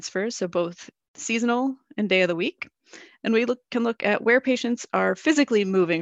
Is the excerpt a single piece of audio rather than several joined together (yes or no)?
yes